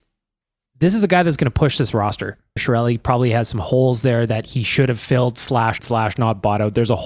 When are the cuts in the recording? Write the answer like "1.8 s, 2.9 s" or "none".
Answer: 2.6 s, 5.8 s